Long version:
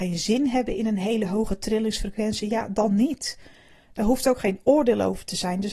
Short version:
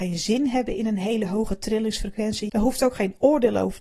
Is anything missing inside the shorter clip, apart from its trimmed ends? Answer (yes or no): yes